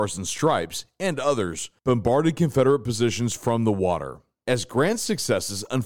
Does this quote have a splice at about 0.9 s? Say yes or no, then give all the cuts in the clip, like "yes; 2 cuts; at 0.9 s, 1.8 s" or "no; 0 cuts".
no; 1 cut; at 4.3 s